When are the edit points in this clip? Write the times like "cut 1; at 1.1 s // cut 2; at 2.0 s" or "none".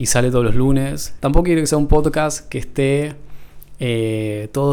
cut 1; at 1.2 s

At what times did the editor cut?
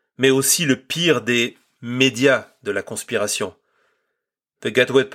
none

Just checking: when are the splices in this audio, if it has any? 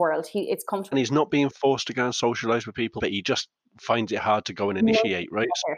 cut 1; at 0.9 s // cut 2; at 3.0 s

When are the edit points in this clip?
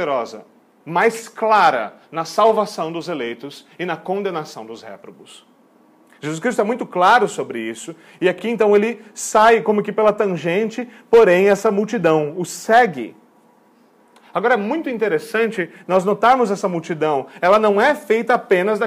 none

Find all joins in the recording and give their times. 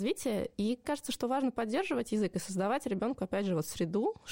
none

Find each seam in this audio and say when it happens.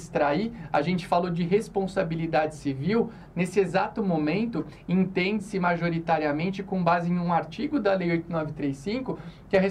none

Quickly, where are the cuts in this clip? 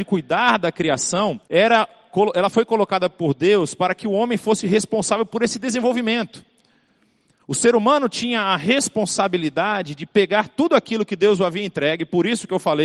cut 1; at 1.4 s

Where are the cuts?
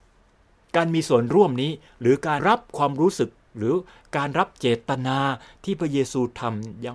cut 1; at 2.4 s

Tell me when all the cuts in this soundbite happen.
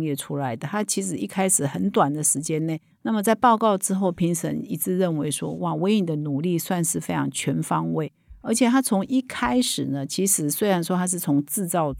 cut 1; at 2.9 s

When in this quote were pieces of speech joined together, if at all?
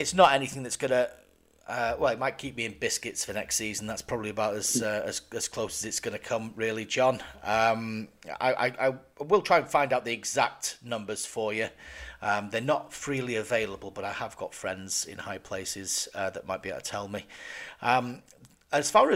none

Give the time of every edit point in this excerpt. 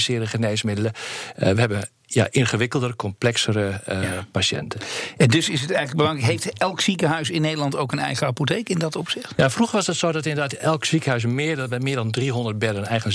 none

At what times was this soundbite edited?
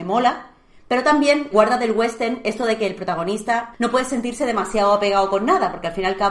cut 1; at 1.5 s // cut 2; at 3.7 s

